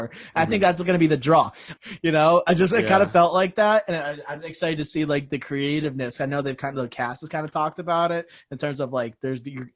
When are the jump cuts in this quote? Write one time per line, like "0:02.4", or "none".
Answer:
0:01.8